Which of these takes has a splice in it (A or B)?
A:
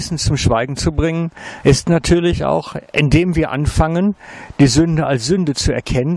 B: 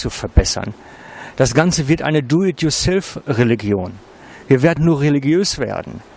B